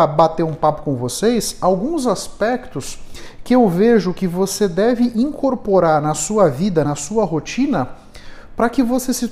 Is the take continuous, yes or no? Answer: yes